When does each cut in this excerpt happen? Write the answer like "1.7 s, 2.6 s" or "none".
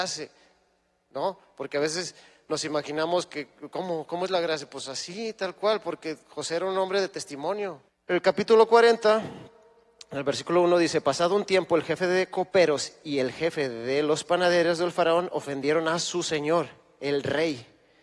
7.9 s